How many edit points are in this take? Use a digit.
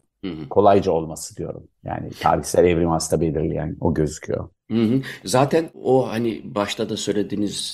0